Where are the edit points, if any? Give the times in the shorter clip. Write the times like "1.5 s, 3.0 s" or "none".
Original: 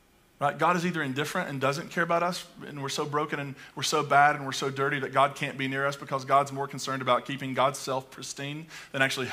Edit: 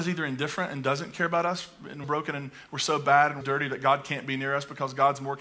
2.0 s, 3.4 s